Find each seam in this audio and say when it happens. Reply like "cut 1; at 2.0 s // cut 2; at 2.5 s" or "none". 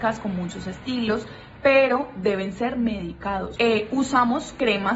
cut 1; at 3.6 s